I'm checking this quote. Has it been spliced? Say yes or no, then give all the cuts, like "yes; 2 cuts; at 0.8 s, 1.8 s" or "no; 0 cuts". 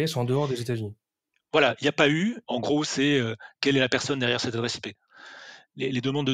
yes; 1 cut; at 2.4 s